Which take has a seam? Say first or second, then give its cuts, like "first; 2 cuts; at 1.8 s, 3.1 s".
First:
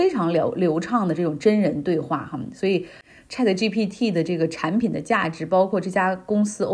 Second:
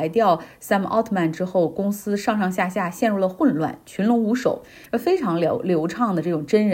second; 1 cut; at 4.9 s